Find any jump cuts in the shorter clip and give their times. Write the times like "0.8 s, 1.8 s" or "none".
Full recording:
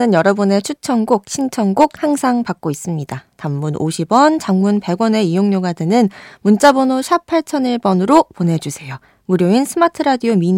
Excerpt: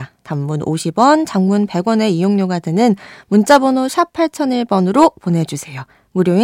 none